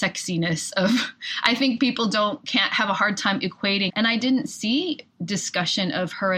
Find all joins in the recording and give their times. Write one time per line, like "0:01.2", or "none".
0:03.9